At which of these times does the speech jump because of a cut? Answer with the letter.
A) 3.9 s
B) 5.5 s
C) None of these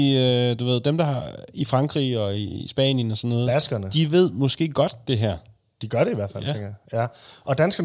C